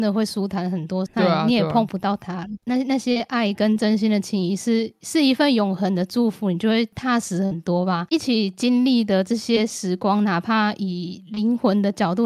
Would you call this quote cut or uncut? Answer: cut